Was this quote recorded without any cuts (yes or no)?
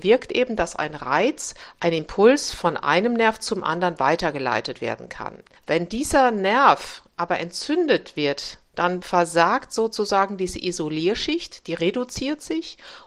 yes